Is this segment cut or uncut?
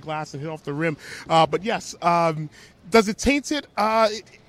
uncut